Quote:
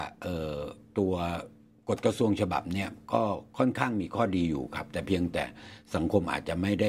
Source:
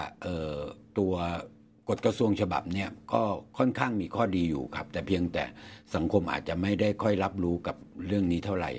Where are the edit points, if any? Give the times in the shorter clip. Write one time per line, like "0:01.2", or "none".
none